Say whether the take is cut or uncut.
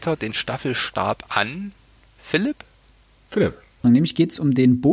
cut